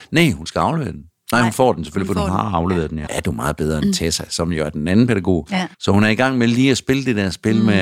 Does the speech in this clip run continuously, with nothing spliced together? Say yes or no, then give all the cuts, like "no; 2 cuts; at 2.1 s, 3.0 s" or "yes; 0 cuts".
no; 2 cuts; at 3.1 s, 5.7 s